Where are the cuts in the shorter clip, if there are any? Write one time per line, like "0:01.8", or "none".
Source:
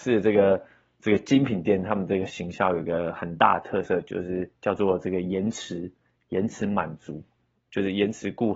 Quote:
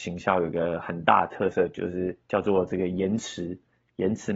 none